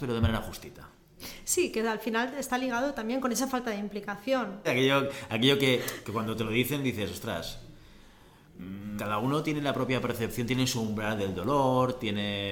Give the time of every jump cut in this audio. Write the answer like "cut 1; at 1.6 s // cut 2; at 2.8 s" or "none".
cut 1; at 4.6 s // cut 2; at 9.0 s